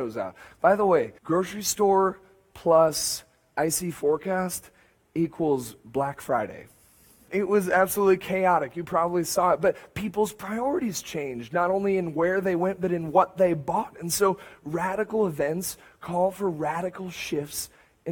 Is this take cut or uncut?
cut